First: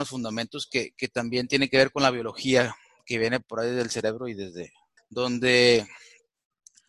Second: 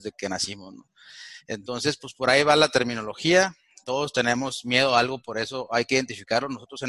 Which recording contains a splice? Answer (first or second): first